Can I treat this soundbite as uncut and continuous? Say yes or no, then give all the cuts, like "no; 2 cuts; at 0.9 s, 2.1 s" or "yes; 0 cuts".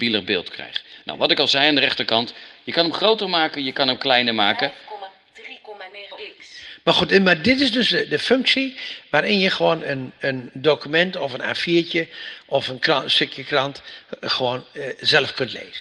yes; 0 cuts